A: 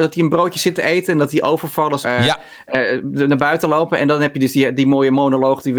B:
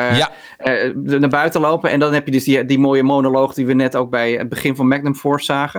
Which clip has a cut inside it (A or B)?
A